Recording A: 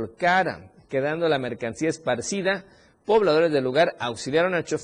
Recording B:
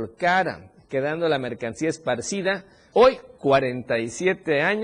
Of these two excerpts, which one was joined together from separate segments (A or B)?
B